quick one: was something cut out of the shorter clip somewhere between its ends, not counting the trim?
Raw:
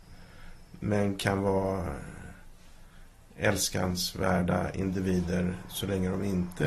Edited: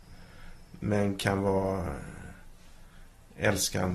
no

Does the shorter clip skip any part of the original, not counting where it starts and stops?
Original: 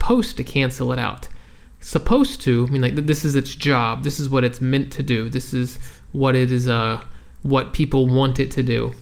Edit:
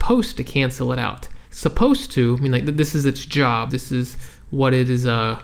yes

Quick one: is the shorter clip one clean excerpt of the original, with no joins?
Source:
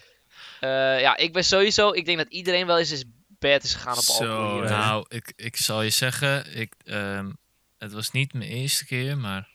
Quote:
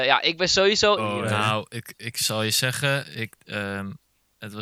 no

